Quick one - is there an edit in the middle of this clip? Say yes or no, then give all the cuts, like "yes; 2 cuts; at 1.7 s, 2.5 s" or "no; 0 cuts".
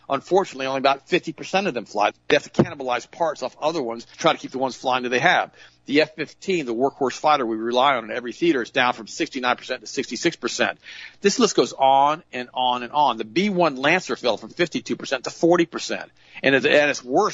yes; 2 cuts; at 2.1 s, 4.1 s